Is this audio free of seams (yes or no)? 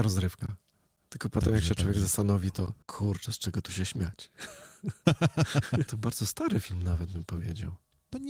no